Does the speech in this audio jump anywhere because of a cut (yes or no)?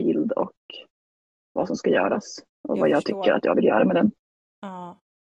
no